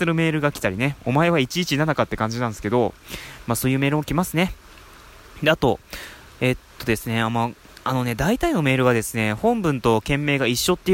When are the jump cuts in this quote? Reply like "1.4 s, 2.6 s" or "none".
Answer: none